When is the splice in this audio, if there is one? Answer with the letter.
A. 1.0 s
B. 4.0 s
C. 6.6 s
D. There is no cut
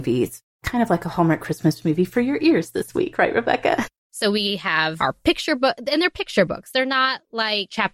B